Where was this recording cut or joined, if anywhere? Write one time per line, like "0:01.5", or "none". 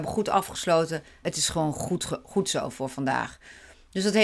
0:01.2